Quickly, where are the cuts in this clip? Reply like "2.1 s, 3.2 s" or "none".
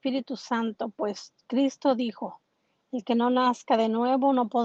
none